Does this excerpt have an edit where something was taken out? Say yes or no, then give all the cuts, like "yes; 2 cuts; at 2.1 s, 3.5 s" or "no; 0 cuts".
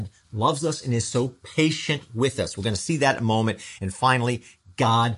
no; 0 cuts